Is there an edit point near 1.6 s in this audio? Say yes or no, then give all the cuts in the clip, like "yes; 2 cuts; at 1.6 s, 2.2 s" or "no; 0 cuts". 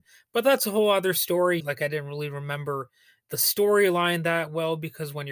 yes; 1 cut; at 1.6 s